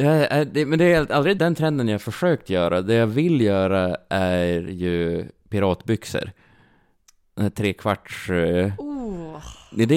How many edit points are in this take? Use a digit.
1